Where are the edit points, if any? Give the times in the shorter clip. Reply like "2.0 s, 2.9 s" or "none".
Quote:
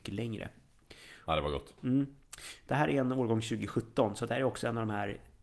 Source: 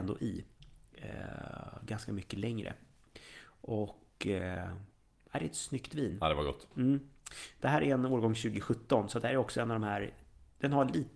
1.3 s